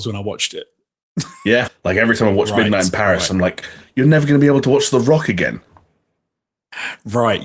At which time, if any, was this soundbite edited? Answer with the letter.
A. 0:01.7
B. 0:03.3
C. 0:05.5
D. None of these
A